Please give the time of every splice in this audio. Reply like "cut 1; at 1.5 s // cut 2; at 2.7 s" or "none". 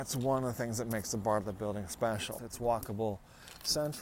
cut 1; at 2.4 s